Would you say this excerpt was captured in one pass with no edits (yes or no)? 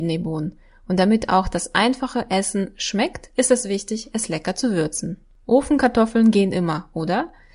yes